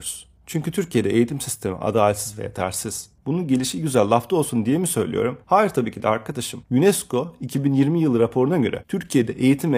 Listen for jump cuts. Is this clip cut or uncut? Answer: cut